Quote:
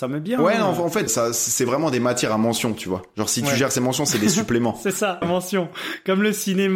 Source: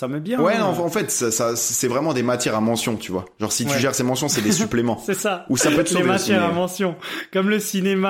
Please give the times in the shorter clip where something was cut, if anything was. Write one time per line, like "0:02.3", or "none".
0:01.1
0:05.2

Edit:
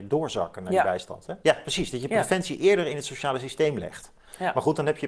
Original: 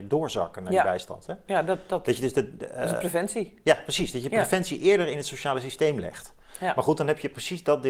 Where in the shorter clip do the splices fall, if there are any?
0:01.4

